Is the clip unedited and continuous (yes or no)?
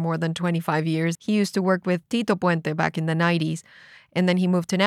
no